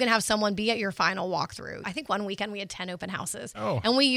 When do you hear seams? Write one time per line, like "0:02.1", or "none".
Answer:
0:01.8